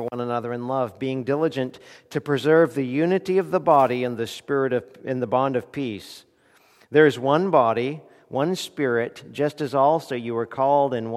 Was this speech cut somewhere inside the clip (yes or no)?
no